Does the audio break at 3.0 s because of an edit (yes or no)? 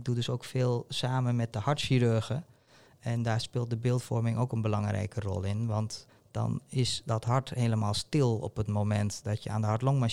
no